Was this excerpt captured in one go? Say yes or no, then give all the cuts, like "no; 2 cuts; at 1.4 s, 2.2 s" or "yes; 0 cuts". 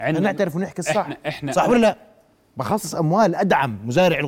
yes; 0 cuts